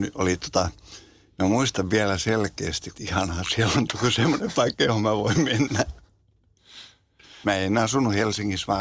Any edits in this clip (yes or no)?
yes